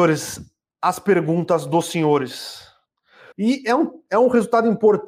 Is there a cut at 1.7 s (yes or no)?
no